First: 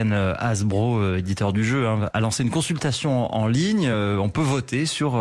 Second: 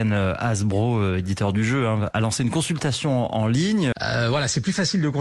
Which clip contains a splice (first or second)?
second